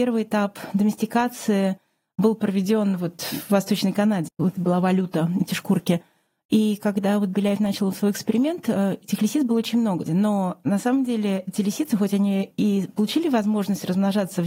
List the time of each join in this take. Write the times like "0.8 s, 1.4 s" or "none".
4.3 s, 10.1 s